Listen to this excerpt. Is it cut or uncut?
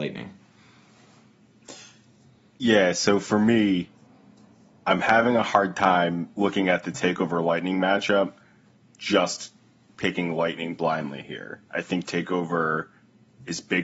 uncut